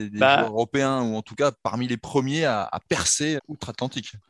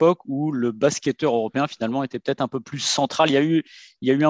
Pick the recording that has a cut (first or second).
first